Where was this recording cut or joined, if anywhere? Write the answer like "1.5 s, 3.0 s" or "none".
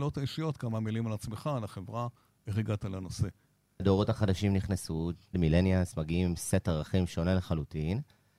3.8 s, 5.3 s